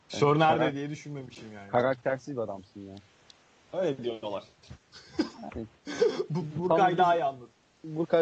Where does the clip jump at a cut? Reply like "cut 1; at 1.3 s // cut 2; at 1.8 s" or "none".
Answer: cut 1; at 3.7 s